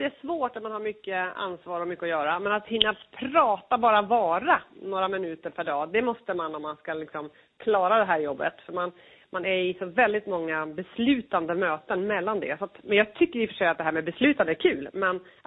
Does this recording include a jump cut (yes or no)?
no